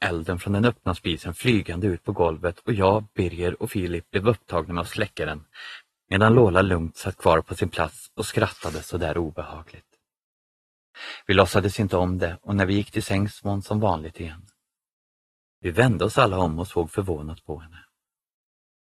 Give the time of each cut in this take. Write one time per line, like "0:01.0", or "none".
0:15.5